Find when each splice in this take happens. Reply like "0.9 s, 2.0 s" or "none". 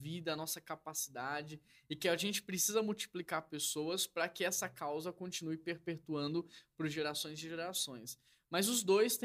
none